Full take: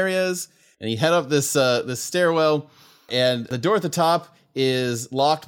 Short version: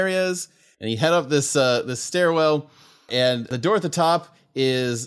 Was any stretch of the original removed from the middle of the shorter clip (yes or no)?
no